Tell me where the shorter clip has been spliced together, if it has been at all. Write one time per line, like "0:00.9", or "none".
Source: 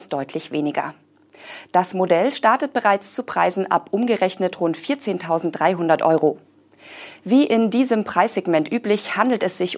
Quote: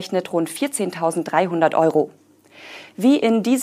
none